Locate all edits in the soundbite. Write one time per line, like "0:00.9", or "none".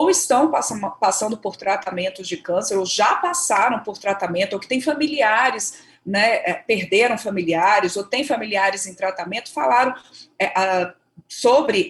none